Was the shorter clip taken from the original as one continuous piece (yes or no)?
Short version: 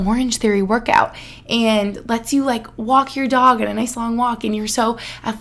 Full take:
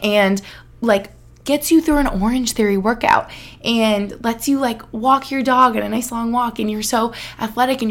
yes